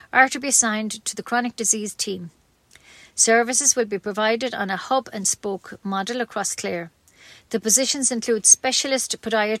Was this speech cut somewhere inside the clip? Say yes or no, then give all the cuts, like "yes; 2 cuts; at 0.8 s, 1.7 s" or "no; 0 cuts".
no; 0 cuts